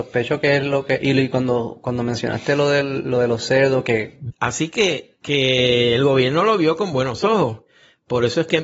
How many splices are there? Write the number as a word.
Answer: one